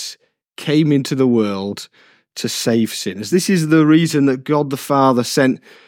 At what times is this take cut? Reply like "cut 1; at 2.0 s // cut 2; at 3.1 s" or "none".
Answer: cut 1; at 3.3 s